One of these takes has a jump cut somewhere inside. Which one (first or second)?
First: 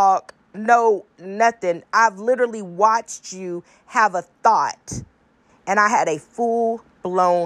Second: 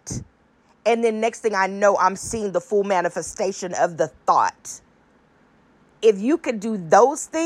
first